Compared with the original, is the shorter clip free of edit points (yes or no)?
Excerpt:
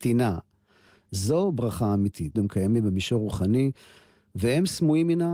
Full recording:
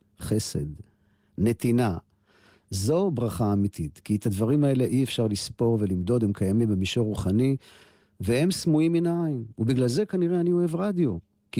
no